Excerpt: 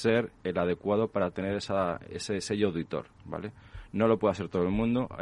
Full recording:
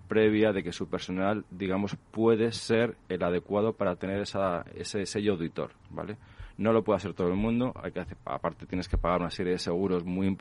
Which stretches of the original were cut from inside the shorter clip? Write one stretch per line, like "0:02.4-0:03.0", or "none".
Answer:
none